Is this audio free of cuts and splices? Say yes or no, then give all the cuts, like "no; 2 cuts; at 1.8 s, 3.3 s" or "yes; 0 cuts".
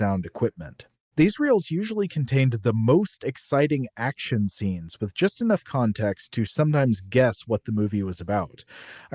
yes; 0 cuts